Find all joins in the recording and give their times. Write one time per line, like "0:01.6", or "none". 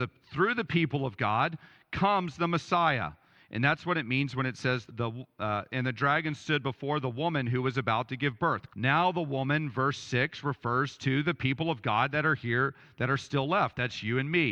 0:04.9
0:08.7